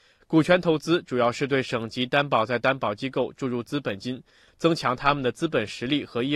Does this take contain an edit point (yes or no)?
no